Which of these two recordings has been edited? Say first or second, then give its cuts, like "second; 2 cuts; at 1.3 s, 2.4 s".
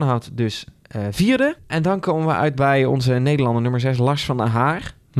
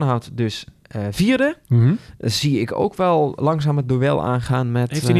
first; 1 cut; at 1.6 s